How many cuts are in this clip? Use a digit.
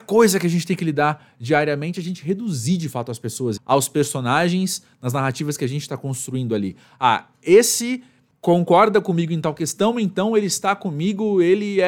1